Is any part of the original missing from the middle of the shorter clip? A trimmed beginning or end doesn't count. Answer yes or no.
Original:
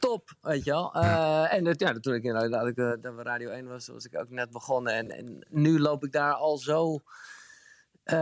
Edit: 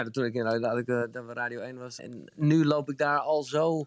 yes